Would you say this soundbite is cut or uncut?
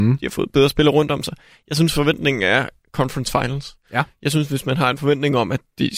cut